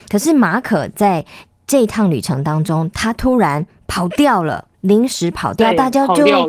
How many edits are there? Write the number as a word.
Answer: zero